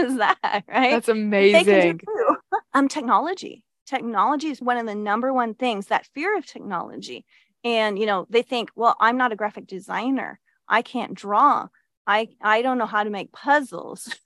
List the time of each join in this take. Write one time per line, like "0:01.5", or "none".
0:02.7
0:04.6